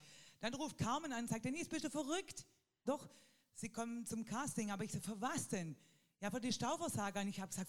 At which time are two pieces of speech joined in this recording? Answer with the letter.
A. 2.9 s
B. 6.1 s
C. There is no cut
A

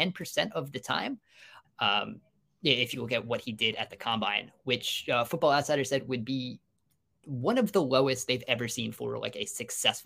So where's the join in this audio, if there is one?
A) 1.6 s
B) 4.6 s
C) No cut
A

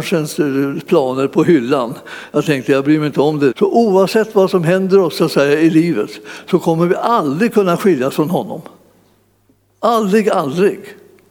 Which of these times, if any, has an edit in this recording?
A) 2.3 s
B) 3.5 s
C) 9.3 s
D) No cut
B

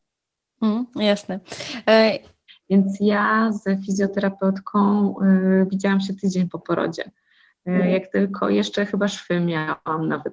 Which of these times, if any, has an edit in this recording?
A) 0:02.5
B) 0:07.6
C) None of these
A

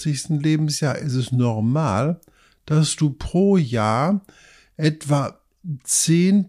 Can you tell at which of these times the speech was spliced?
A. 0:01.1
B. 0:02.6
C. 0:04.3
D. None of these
D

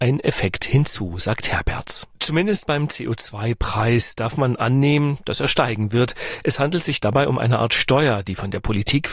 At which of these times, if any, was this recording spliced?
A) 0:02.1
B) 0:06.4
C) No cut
A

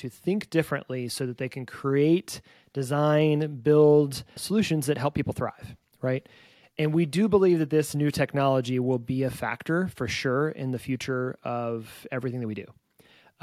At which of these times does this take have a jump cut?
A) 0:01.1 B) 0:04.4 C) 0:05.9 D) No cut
B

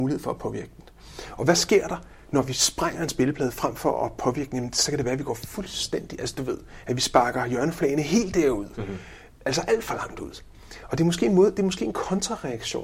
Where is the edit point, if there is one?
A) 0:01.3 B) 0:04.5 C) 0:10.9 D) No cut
D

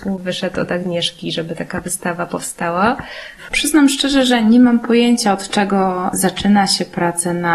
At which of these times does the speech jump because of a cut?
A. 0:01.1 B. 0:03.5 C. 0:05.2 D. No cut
B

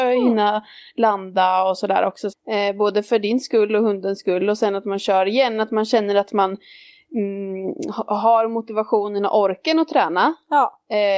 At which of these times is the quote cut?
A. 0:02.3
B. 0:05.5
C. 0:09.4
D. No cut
A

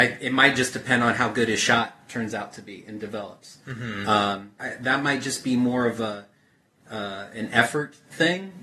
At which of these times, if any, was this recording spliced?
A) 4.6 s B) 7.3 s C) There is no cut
A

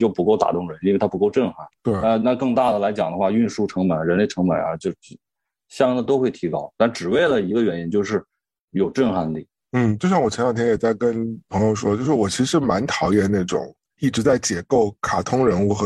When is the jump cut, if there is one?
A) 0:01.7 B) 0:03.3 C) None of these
A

